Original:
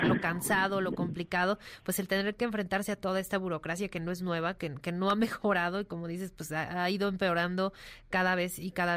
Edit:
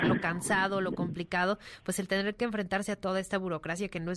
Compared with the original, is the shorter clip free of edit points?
yes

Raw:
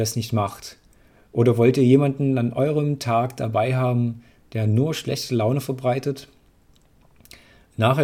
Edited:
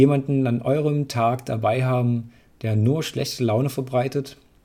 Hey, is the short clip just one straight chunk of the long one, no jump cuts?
yes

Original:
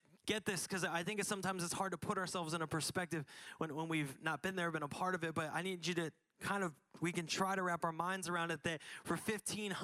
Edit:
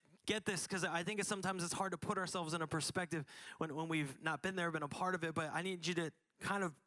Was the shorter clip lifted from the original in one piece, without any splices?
yes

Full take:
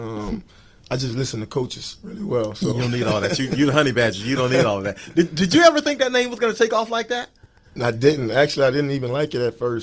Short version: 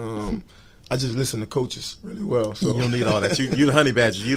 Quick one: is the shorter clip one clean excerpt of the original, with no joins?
yes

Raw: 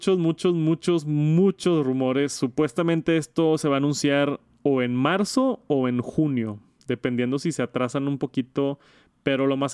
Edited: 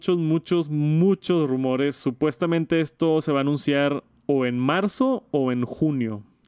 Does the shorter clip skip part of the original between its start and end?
no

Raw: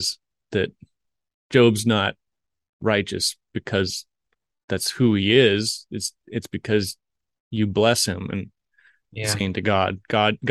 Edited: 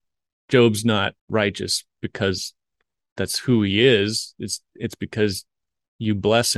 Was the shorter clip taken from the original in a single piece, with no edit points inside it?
no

